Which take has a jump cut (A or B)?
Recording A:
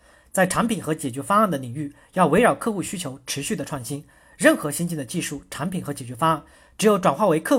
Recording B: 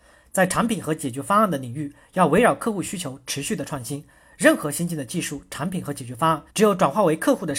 B